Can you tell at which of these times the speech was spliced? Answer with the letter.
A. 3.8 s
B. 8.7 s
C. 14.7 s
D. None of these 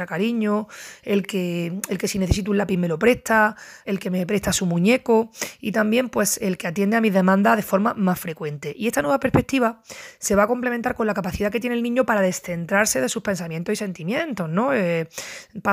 A